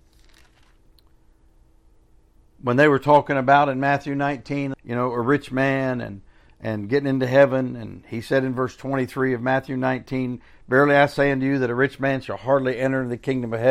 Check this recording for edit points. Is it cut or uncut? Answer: cut